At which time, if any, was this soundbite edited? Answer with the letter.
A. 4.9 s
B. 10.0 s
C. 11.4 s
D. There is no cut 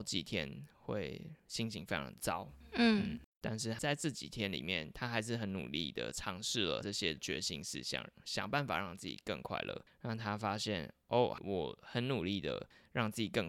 D